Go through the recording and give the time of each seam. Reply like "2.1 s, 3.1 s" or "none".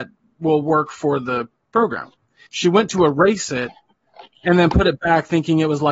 2.5 s